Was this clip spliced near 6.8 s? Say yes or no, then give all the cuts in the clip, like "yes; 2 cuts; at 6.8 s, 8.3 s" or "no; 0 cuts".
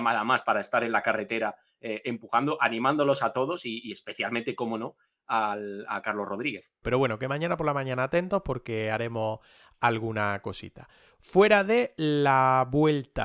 yes; 1 cut; at 6.8 s